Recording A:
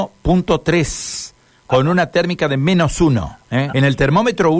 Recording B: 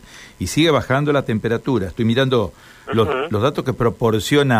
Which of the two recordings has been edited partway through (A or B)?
A